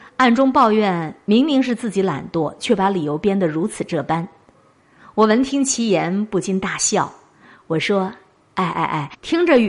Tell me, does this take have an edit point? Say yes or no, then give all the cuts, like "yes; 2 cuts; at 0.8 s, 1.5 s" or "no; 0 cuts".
no; 0 cuts